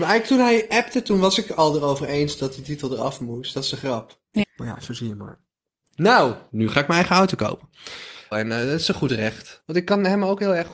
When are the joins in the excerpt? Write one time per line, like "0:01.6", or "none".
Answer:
0:04.4
0:06.5
0:08.3